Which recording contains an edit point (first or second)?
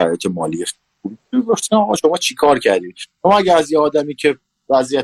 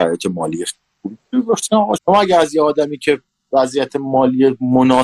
second